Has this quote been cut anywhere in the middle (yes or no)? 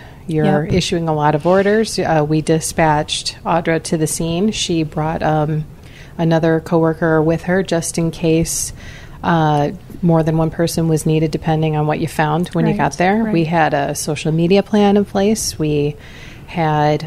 no